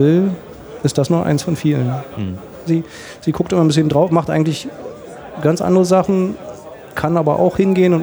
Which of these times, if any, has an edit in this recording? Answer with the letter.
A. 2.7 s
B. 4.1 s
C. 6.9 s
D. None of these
A